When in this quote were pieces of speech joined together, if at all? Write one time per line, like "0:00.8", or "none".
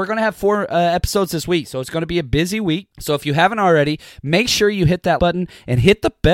0:02.9
0:05.2